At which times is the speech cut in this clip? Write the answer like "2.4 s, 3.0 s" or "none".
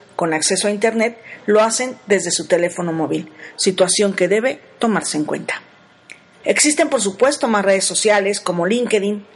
6.4 s